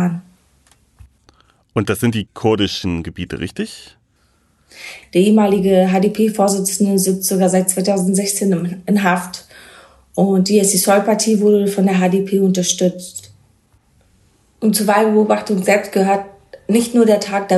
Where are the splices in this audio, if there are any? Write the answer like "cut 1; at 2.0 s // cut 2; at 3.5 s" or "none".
cut 1; at 5.0 s